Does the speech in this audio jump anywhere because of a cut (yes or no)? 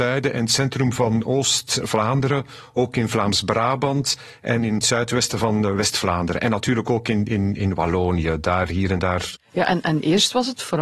yes